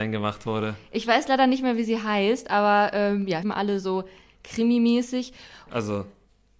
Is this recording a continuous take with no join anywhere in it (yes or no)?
no